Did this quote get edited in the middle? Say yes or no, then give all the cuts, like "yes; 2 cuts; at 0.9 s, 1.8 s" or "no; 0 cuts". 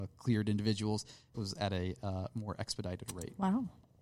yes; 1 cut; at 1.3 s